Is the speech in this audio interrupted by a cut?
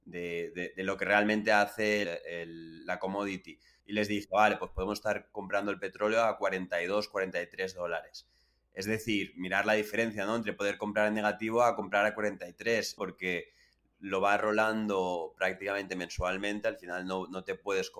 yes; 3 cuts; at 2.0 s, 3.8 s, 13.0 s

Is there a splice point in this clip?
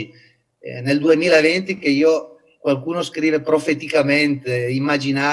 no; 0 cuts

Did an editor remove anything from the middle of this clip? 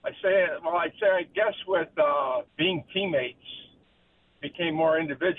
yes; 1 cut; at 2.5 s

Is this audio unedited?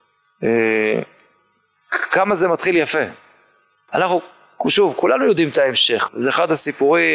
no; 2 cuts; at 3.9 s, 6.1 s

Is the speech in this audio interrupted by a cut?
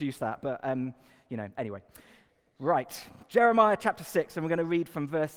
no; 0 cuts

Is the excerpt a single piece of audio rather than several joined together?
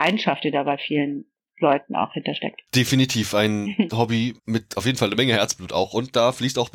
no; 2 cuts; at 2.7 s, 4.4 s

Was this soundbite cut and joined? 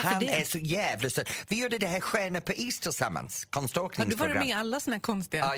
no; 0 cuts

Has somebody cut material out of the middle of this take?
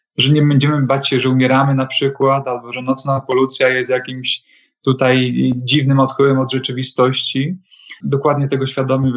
yes; 1 cut; at 8.0 s

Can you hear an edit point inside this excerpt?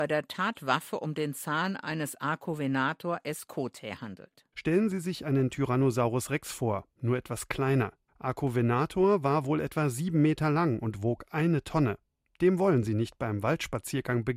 no; 0 cuts

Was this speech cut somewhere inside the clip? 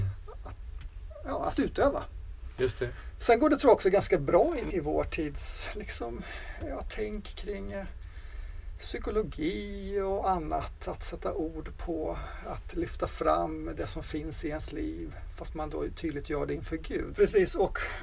yes; 2 cuts; at 4.7 s, 17.1 s

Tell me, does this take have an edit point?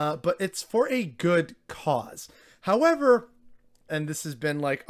yes; 1 cut; at 3.9 s

